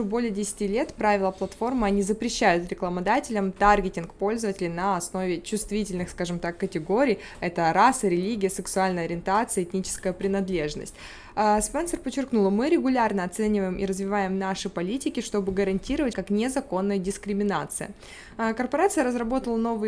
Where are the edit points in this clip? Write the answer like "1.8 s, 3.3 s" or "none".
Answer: 16.1 s